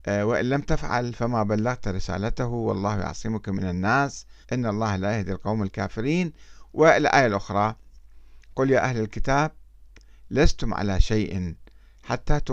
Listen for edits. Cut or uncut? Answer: cut